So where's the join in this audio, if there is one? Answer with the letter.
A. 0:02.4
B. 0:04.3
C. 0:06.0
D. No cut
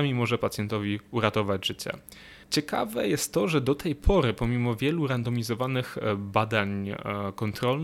A